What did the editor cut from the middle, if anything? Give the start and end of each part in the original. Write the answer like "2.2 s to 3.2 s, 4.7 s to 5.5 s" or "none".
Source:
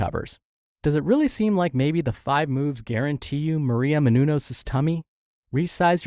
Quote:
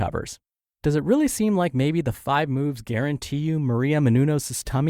none